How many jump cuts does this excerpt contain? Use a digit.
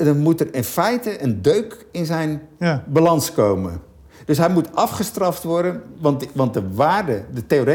0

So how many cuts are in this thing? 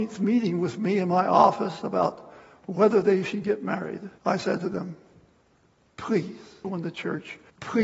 1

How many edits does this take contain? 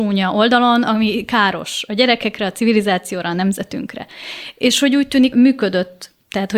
1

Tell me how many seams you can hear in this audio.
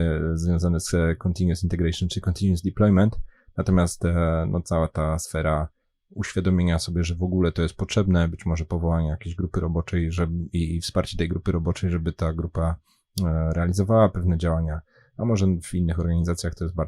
0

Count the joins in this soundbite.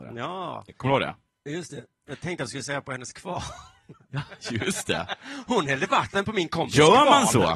0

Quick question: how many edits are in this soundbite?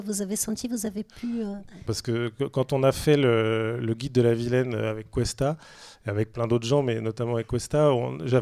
1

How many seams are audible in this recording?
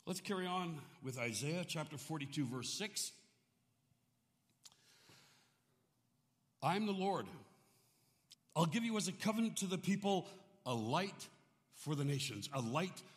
1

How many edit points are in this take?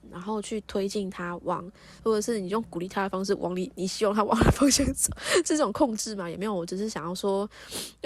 1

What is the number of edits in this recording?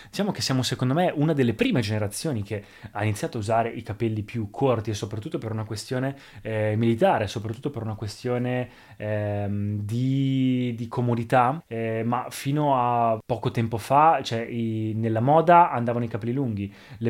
0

